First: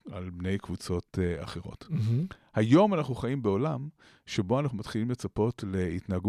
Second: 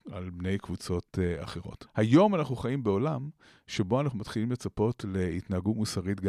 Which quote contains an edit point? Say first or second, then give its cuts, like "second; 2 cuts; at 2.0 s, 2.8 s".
second; 1 cut; at 1.9 s